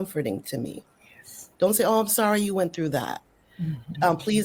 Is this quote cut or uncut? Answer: cut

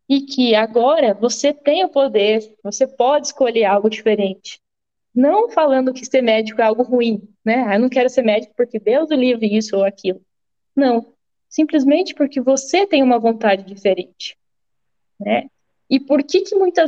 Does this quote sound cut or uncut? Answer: uncut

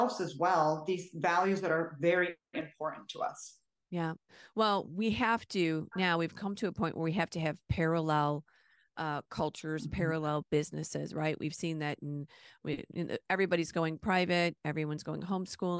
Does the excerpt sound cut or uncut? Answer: uncut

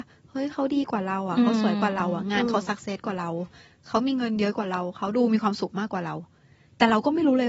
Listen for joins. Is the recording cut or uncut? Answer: uncut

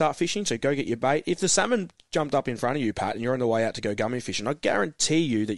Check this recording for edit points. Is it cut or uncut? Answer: uncut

